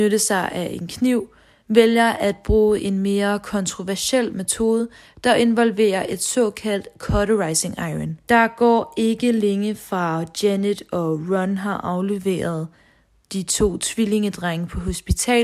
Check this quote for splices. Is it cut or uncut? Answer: cut